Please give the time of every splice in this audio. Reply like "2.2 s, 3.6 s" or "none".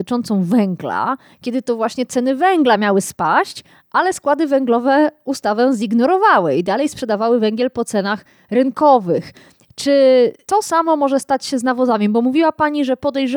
none